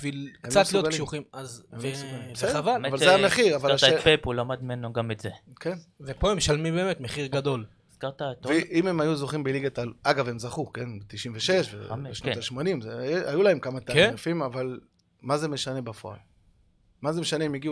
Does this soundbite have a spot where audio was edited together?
no; 0 cuts

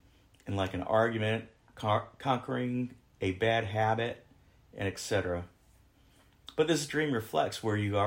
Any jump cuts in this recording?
no; 0 cuts

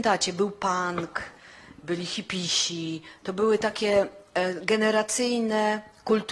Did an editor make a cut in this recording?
no; 0 cuts

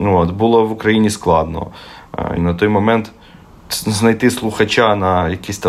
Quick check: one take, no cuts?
no; 1 cut; at 2.4 s

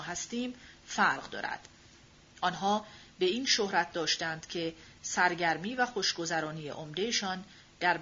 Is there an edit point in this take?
yes; 1 cut; at 2.2 s

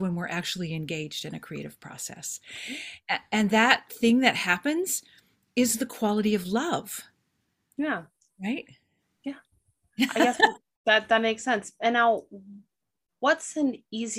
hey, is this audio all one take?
yes; 0 cuts

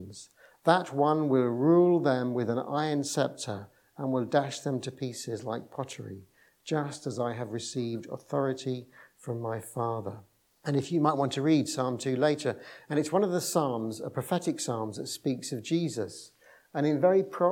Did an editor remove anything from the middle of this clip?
yes; 1 cut; at 10.6 s

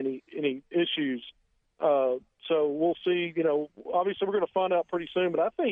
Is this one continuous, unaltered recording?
yes; 0 cuts

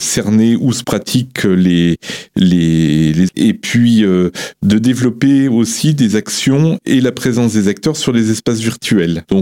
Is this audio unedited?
no; 1 cut; at 3.3 s

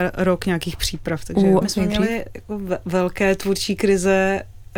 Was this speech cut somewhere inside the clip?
yes; 1 cut; at 1.6 s

